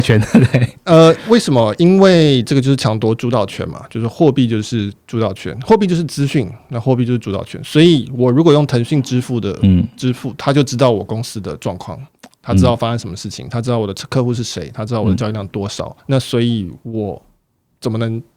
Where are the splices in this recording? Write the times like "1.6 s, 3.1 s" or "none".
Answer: 16.0 s